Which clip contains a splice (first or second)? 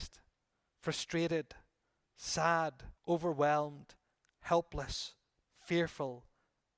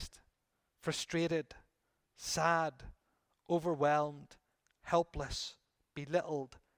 first